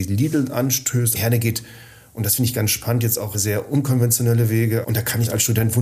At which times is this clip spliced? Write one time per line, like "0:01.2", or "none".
0:01.1
0:03.3
0:04.8